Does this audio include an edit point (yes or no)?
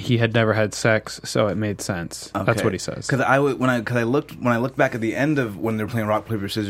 no